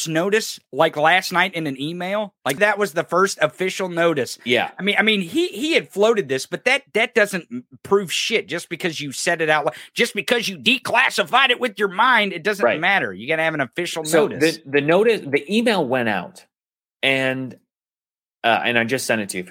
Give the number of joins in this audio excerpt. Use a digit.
1